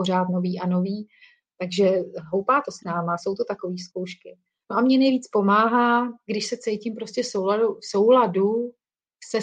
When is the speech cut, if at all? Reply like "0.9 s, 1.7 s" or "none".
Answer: none